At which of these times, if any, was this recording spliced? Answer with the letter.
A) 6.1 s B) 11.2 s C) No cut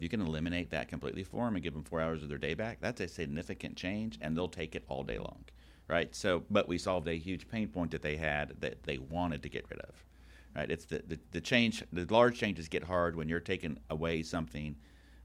C